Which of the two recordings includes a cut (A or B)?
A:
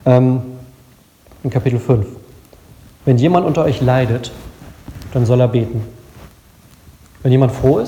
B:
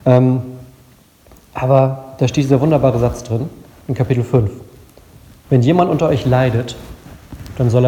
A